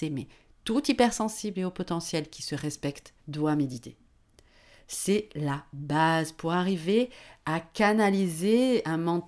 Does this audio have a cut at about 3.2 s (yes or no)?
yes